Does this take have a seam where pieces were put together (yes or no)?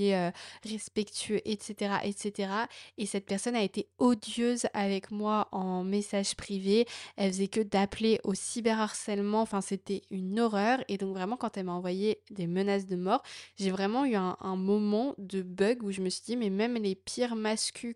no